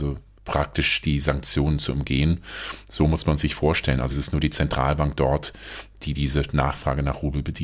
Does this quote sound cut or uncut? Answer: cut